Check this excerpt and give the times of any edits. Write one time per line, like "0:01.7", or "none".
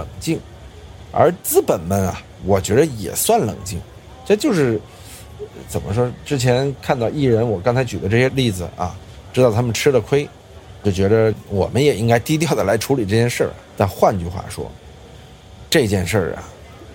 0:13.7